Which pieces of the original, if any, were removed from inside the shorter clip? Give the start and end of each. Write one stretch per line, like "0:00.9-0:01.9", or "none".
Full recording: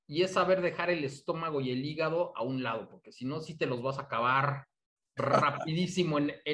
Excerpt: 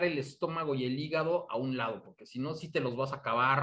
none

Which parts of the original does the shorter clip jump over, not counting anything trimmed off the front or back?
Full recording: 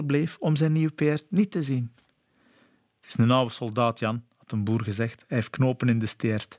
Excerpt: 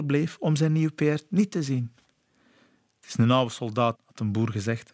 0:03.9-0:04.3

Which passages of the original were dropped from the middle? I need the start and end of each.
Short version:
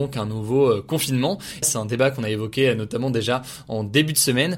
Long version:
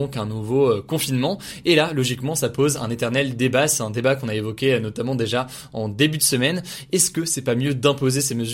0:01.6-0:03.7

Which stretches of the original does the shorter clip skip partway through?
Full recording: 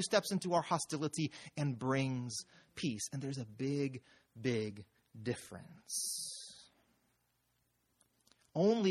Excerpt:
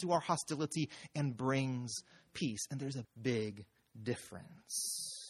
0:03.5-0:04.2

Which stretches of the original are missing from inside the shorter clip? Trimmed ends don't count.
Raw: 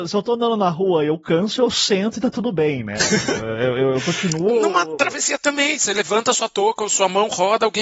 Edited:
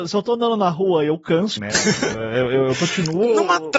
0:01.6-0:02.8

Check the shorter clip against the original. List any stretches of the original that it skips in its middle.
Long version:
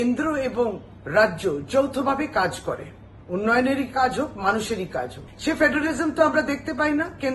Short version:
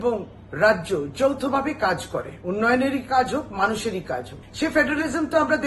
0:02.9-0:03.3

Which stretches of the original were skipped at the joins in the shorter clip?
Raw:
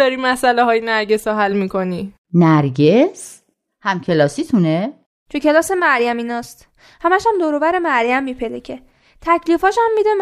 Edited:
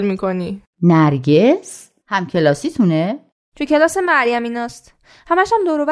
0:03.5-0:03.7

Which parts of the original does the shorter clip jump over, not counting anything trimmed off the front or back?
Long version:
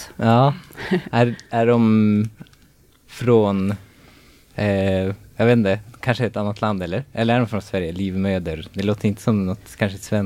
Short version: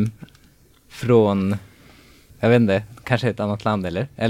0:04.5-0:05.3

